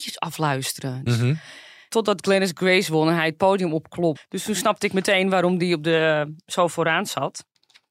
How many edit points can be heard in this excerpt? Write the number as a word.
two